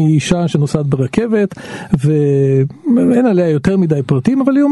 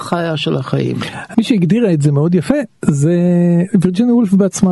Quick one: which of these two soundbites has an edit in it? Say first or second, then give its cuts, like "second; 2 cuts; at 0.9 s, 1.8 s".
second; 1 cut; at 1.3 s